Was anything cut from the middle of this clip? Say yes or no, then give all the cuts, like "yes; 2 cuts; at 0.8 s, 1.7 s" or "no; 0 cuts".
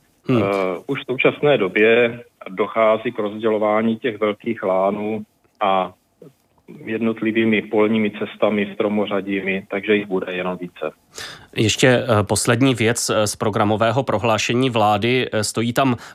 no; 0 cuts